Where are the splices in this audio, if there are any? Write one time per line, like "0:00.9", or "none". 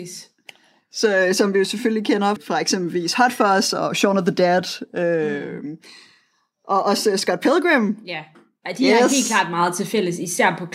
0:02.4